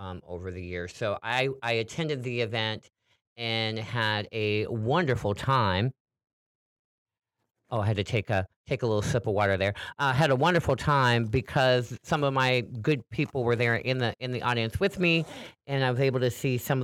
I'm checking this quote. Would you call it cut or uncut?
uncut